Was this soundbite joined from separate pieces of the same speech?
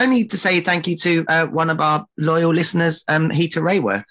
no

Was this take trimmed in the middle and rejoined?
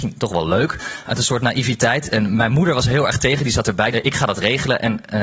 yes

